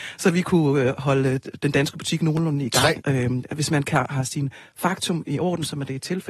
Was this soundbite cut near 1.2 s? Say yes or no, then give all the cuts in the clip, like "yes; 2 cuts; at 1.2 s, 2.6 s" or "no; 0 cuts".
no; 1 cut; at 3.0 s